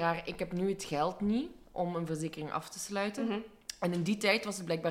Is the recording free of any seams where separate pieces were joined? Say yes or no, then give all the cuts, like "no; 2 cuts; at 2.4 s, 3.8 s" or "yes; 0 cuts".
yes; 0 cuts